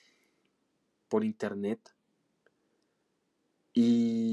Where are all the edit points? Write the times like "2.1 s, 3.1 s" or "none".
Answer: none